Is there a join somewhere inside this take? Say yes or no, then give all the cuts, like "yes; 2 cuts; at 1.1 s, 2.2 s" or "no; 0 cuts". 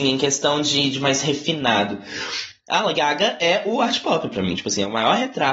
yes; 1 cut; at 0.9 s